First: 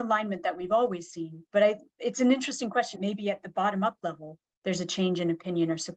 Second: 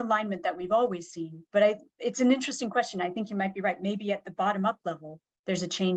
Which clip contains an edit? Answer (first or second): first